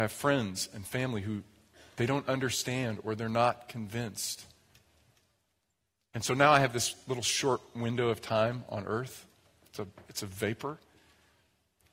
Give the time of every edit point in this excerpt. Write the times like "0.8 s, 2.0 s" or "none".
10.1 s